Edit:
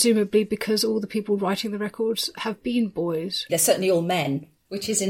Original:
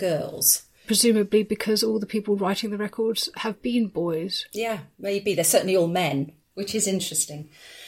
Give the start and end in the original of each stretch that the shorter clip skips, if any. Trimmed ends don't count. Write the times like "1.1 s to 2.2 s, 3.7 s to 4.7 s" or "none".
4.5 s to 5.3 s